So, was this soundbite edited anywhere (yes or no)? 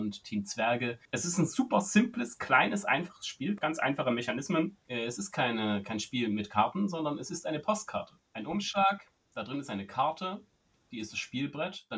yes